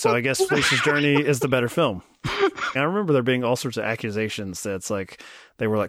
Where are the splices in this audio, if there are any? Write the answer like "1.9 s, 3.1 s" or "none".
2.7 s